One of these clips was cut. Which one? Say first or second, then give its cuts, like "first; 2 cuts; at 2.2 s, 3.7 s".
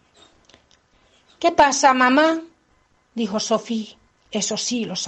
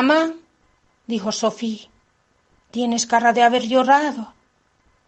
first; 1 cut; at 4.2 s